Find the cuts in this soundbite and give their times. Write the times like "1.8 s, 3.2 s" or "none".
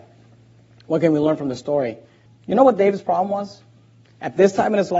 2.3 s